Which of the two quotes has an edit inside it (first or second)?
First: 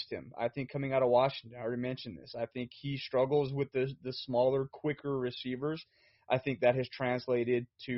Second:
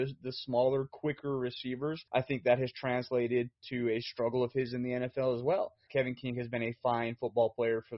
second